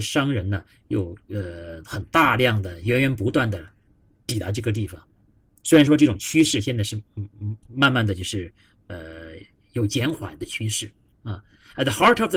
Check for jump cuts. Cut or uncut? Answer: cut